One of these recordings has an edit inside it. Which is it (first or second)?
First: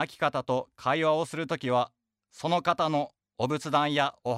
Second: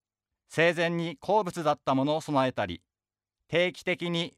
second